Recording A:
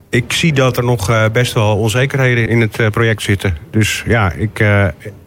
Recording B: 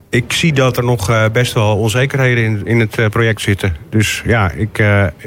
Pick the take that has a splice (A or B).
A